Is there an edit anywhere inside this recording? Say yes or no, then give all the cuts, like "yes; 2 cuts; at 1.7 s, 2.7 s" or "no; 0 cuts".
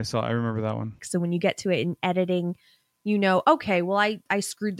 yes; 1 cut; at 1.0 s